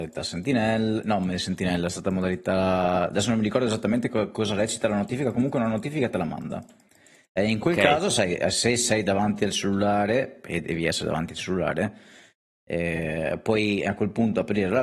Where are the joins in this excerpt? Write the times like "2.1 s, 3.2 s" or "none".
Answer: none